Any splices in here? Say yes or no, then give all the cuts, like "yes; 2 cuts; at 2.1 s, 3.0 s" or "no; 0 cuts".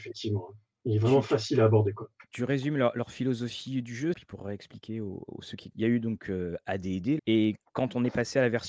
yes; 3 cuts; at 4.1 s, 5.7 s, 7.2 s